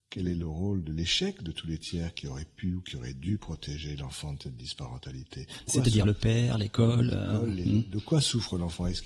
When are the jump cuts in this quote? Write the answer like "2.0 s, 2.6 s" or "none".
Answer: none